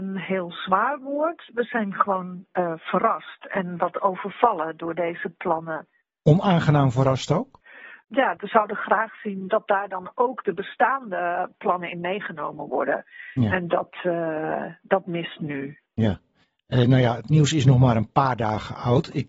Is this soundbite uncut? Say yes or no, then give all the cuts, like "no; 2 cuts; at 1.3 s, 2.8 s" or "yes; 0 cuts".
yes; 0 cuts